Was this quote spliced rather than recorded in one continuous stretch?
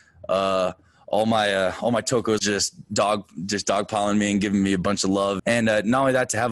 yes; 2 cuts; at 2.4 s, 5.4 s

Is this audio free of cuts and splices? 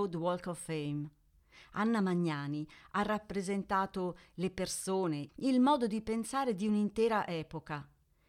no; 1 cut; at 5.3 s

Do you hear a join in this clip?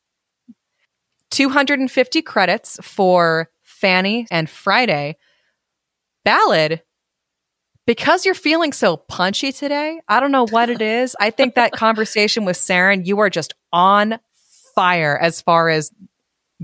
yes; 1 cut; at 4.3 s

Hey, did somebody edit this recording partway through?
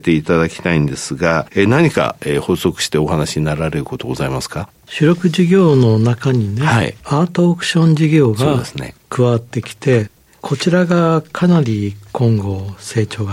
no; 0 cuts

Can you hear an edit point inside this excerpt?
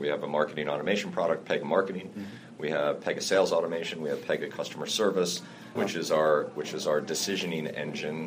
yes; 1 cut; at 5.7 s

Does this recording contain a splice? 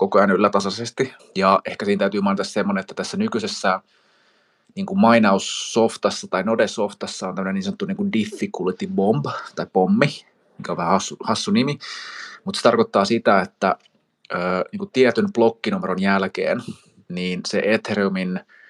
yes; 1 cut; at 1.2 s

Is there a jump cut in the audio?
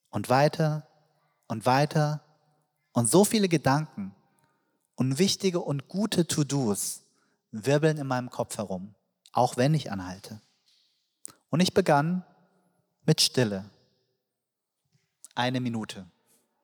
yes; 1 cut; at 9.2 s

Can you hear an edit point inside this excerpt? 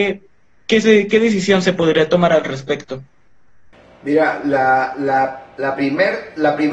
no; 0 cuts

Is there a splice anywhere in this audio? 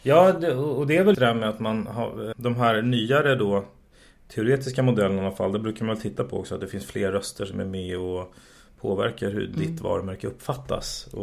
yes; 2 cuts; at 1.1 s, 2.3 s

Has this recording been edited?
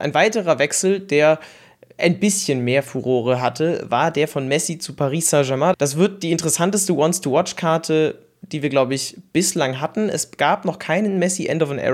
yes; 1 cut; at 5.7 s

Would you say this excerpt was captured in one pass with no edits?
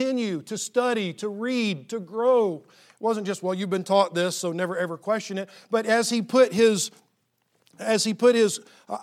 yes; 0 cuts

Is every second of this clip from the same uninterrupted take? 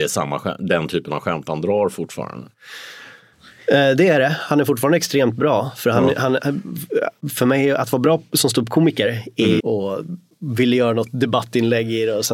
no; 1 cut; at 9.6 s

